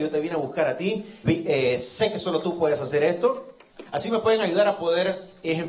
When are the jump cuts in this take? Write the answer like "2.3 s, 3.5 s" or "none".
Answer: 1.2 s, 3.9 s